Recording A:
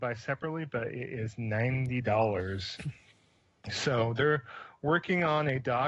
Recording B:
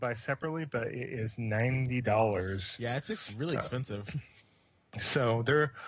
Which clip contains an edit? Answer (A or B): A